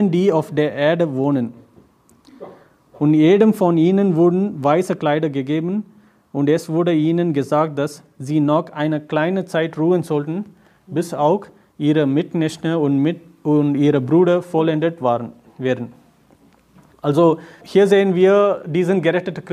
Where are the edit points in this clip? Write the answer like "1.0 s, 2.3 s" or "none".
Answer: 17.6 s, 18.6 s